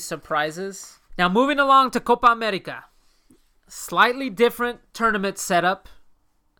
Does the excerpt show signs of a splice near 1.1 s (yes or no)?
yes